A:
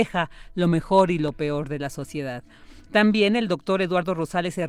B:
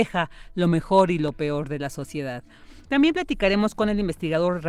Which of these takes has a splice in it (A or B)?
B